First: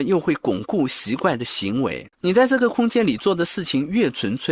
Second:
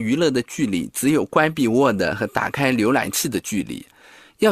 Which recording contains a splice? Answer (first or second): first